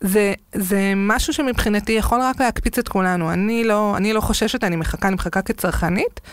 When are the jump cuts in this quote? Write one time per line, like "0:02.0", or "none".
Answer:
none